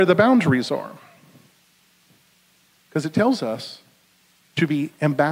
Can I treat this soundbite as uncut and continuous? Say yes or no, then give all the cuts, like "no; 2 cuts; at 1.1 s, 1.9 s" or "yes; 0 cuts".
no; 1 cut; at 2.7 s